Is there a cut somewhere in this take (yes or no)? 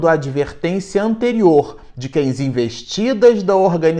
no